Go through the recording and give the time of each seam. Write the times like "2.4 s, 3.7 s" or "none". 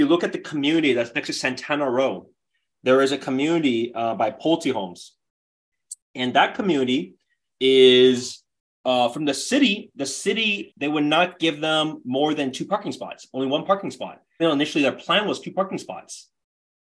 10.7 s, 14.4 s